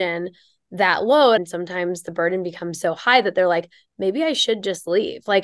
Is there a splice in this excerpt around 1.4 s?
yes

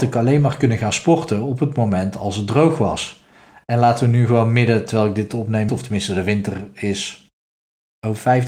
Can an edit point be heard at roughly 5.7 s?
yes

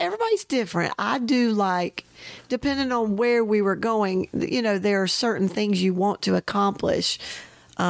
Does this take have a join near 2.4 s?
no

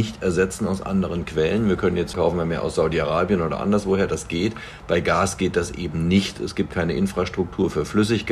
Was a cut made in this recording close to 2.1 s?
yes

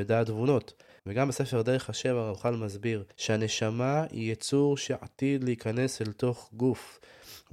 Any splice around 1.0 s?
yes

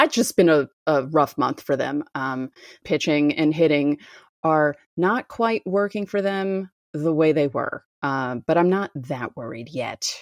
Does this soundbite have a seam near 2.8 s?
yes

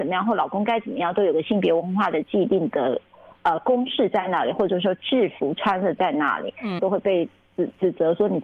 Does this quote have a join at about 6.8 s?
yes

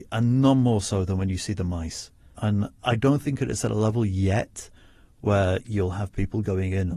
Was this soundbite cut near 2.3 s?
yes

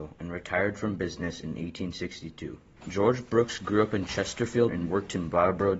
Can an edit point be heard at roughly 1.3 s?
no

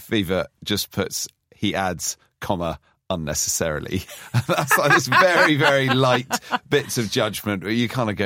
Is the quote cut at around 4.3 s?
no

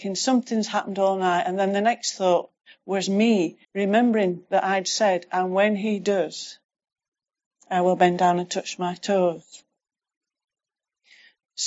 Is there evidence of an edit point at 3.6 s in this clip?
yes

